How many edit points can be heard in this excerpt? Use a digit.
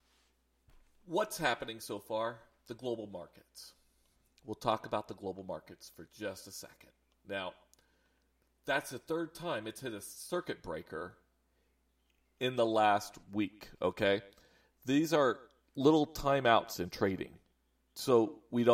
1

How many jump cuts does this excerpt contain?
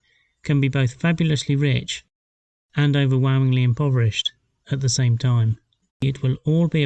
1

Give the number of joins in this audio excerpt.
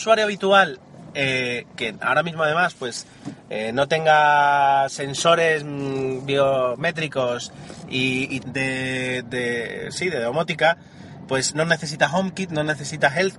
1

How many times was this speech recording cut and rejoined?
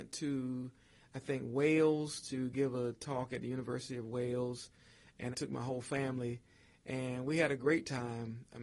1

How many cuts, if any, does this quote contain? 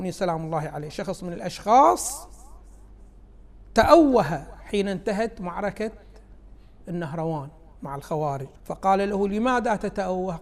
1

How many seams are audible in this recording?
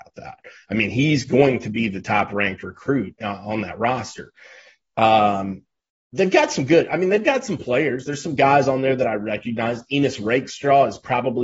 0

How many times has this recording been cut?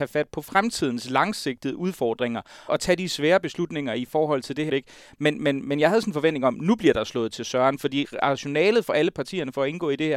2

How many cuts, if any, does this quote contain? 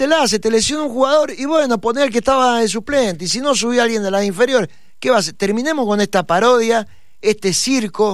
0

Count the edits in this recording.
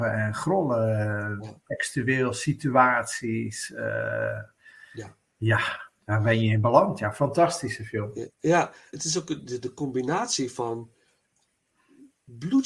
1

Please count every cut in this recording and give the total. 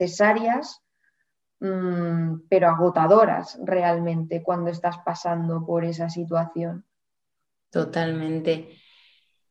0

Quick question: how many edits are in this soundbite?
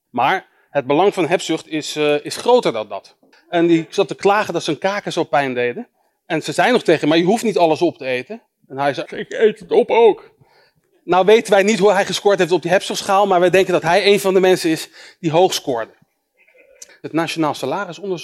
3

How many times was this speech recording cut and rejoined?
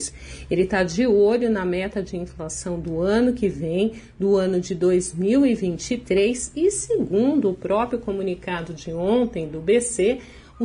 0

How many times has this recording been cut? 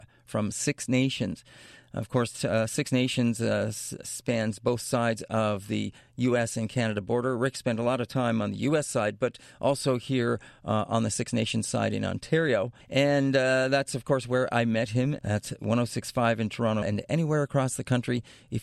3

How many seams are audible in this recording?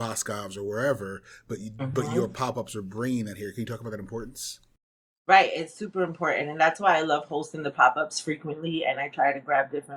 0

